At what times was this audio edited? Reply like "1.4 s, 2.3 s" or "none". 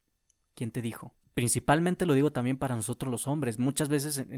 1.2 s

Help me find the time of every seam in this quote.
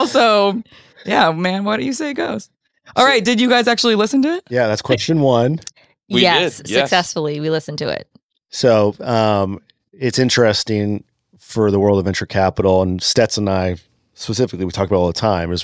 none

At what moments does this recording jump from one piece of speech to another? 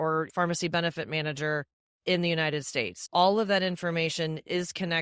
none

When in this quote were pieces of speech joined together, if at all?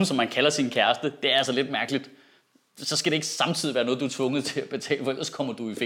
none

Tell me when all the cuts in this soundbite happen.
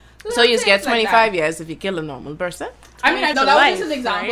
3.3 s

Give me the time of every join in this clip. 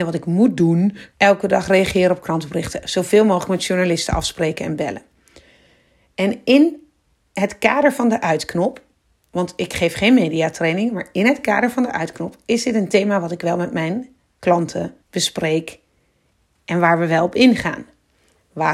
1.1 s, 15.0 s

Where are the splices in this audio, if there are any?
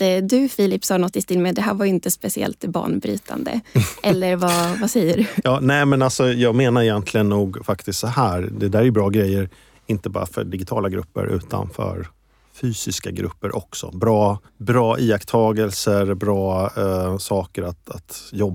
14.5 s

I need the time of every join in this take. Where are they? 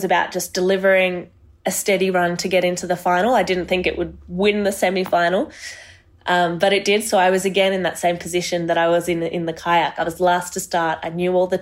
none

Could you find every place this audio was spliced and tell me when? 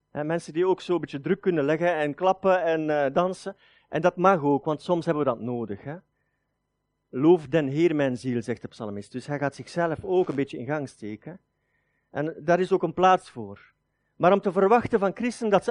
none

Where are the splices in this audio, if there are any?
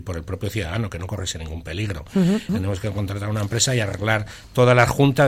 2.5 s

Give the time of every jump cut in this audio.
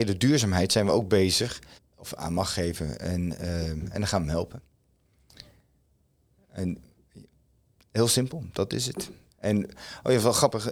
1.8 s

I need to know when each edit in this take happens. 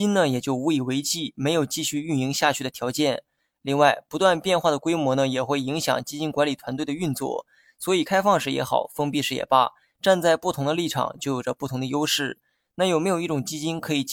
none

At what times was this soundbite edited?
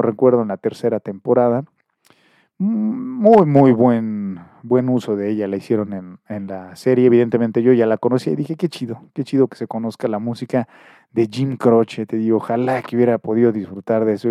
none

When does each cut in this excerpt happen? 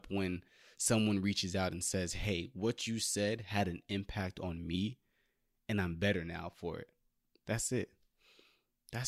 none

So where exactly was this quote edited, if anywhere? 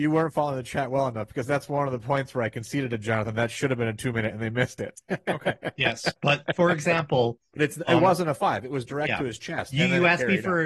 none

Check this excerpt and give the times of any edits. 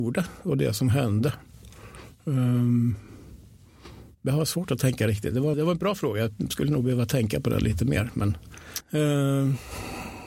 5.5 s, 8.8 s

